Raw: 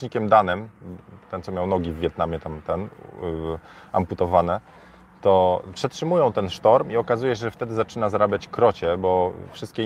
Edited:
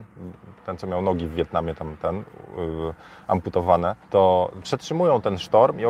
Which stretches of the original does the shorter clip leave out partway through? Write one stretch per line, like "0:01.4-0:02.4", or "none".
0:04.7-0:05.1